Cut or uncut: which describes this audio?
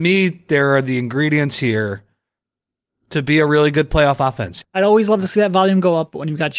cut